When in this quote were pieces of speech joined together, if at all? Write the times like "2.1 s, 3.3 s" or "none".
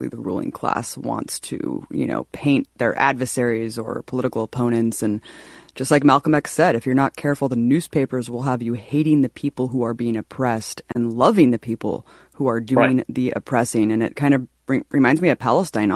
none

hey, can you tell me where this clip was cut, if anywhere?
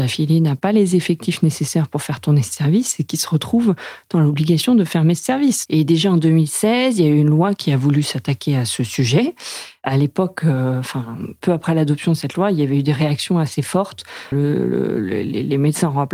5.7 s, 14.3 s

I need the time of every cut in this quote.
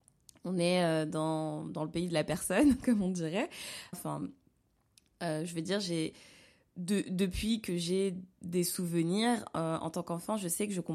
3.9 s

